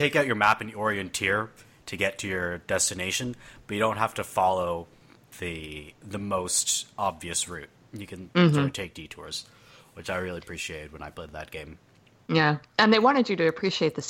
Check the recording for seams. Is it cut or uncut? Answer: uncut